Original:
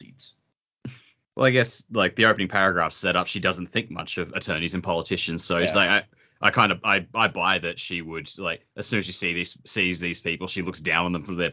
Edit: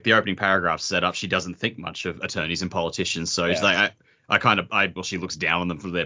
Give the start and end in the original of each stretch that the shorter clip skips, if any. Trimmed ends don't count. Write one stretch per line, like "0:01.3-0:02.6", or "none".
0:07.1-0:10.4